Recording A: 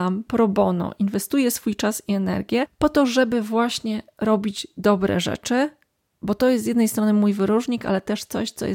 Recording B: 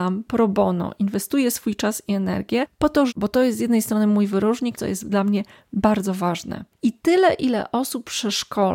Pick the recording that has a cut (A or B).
B